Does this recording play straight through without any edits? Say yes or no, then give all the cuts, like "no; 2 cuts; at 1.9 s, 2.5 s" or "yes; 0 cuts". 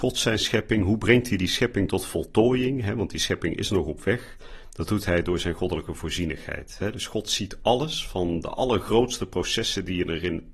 yes; 0 cuts